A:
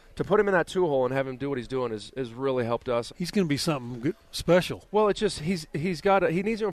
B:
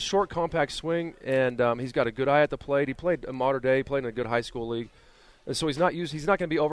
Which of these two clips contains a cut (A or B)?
A